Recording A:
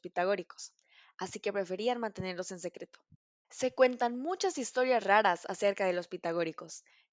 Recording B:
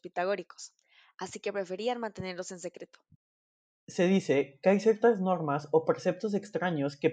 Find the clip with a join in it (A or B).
A